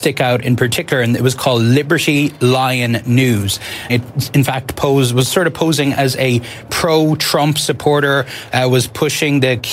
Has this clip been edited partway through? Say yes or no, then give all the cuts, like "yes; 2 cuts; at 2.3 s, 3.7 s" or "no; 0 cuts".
yes; 1 cut; at 3.9 s